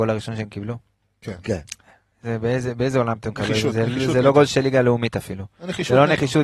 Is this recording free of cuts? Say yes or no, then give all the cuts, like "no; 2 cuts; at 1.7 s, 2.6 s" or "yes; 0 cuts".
yes; 0 cuts